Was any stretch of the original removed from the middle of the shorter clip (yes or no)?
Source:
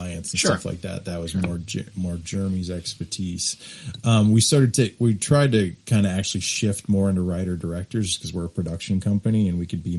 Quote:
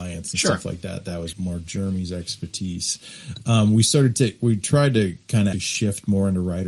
yes